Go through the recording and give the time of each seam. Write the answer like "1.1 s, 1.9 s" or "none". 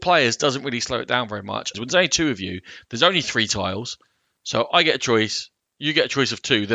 1.7 s